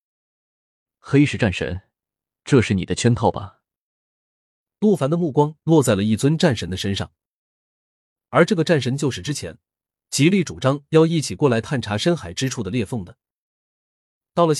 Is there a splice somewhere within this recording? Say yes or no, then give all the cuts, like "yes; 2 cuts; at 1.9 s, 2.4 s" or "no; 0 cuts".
no; 0 cuts